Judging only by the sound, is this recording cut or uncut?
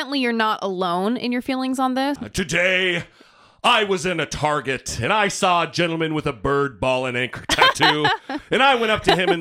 cut